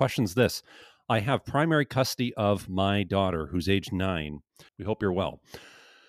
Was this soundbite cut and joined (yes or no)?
yes